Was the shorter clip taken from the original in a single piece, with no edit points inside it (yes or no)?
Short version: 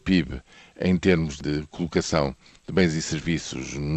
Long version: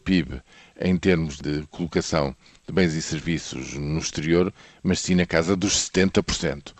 yes